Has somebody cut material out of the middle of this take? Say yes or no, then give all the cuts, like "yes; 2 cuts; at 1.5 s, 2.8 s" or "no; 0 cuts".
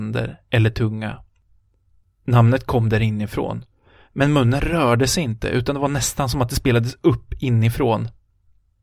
yes; 2 cuts; at 2.0 s, 4.1 s